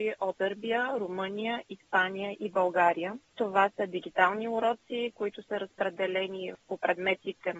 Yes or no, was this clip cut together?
no